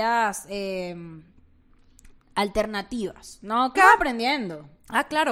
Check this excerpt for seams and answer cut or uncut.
cut